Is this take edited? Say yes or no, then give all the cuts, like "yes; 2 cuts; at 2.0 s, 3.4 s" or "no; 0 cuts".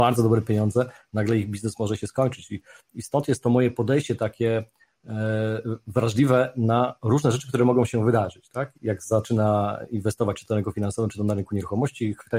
yes; 1 cut; at 8.8 s